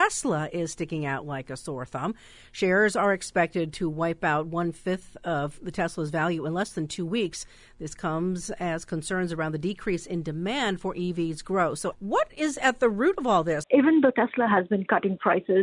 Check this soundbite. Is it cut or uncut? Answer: cut